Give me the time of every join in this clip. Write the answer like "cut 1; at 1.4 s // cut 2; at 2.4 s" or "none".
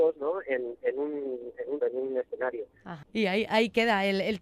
cut 1; at 1.8 s // cut 2; at 3.0 s